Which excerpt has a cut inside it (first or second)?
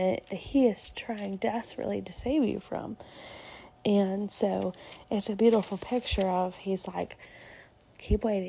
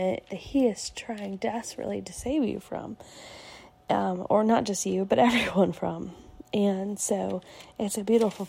first